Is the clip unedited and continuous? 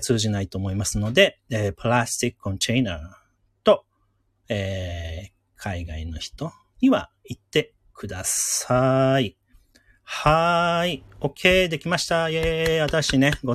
yes; 0 cuts

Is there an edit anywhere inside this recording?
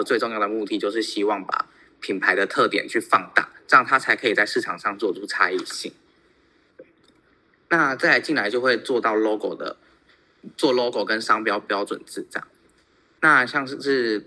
no; 0 cuts

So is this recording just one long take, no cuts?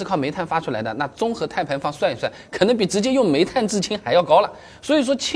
yes; 0 cuts

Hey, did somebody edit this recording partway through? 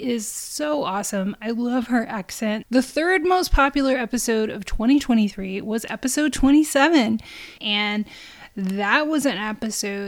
yes; 2 cuts; at 2.6 s, 7.6 s

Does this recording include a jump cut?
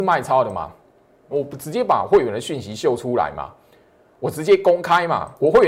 yes; 1 cut; at 1.3 s

